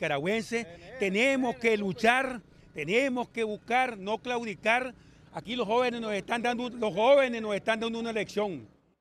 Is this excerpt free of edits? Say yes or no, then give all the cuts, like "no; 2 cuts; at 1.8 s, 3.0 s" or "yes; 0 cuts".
yes; 0 cuts